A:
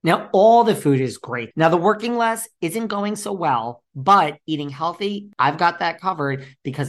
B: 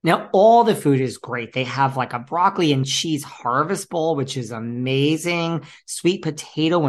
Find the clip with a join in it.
A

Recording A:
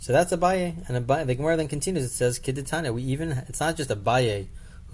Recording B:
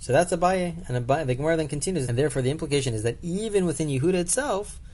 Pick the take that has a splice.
B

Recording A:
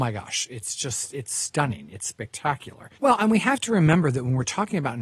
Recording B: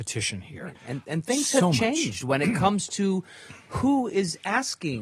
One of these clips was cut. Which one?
A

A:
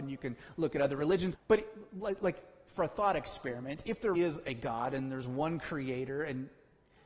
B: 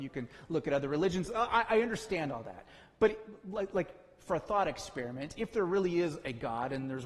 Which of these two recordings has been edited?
A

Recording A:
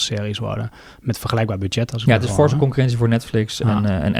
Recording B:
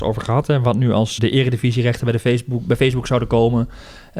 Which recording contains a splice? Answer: B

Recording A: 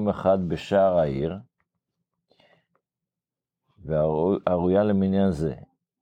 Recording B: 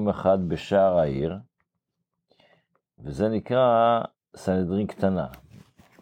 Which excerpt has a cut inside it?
B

